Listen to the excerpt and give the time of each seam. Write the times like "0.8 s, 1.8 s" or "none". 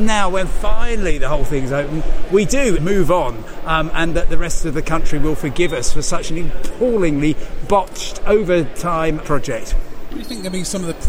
2.8 s, 9.2 s

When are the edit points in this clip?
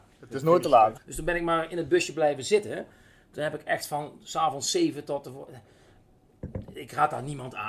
1.0 s

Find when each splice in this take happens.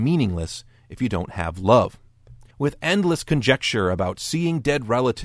2.5 s

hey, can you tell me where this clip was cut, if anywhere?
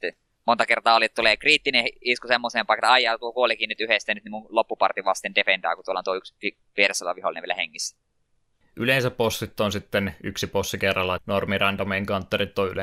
8.6 s, 11.2 s

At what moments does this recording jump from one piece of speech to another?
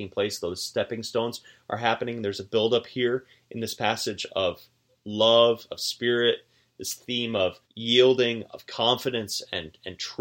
5.7 s, 7.6 s

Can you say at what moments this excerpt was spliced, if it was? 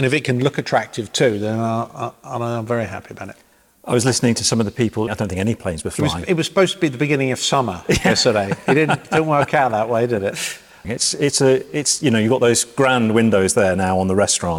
5.1 s, 10.8 s

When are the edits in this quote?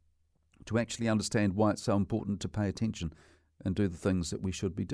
none

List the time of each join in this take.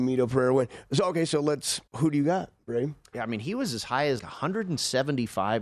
1.9 s, 3.1 s, 4.2 s

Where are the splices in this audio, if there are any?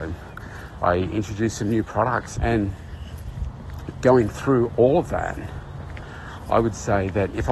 2.3 s

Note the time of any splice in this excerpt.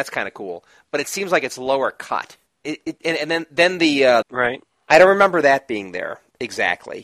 2.6 s, 4.2 s

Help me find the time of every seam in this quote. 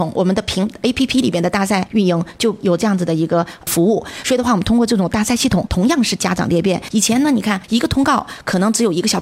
none

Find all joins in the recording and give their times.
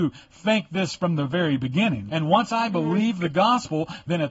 2.1 s

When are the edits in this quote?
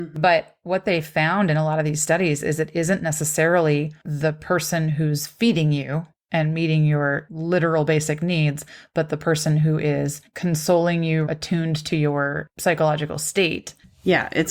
11.3 s

